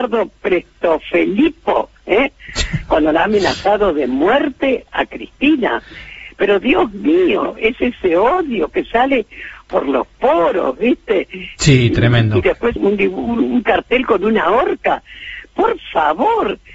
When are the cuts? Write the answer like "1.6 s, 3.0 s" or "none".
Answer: 11.6 s, 12.8 s